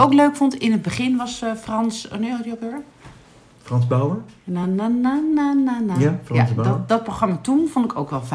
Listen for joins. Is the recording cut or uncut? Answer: uncut